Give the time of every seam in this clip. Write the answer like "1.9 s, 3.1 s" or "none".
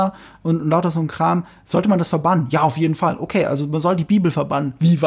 none

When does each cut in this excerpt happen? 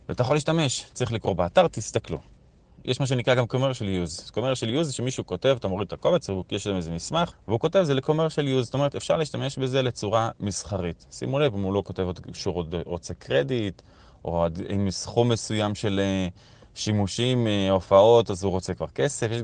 none

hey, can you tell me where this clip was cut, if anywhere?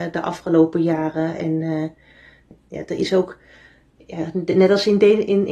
none

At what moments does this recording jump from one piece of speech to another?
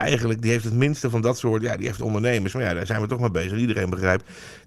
none

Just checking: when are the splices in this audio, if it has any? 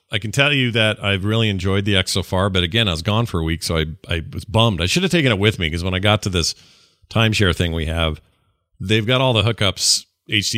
none

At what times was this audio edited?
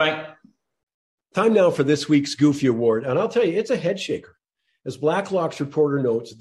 none

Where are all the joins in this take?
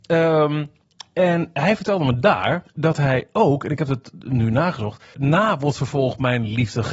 2.7 s, 5.1 s

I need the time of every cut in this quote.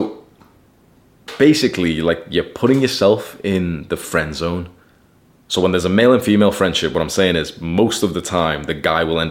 5.5 s

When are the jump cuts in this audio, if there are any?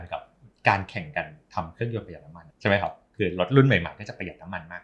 2.5 s

